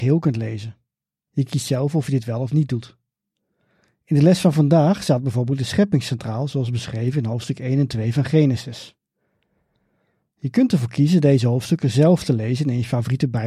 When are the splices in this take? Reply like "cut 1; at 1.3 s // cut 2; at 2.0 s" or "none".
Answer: cut 1; at 1.3 s